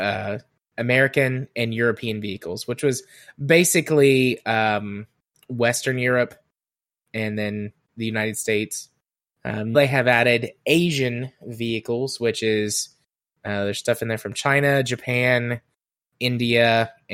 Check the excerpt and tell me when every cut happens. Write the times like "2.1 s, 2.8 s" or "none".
9.7 s